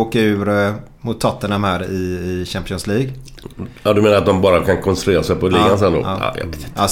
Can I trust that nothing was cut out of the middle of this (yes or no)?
yes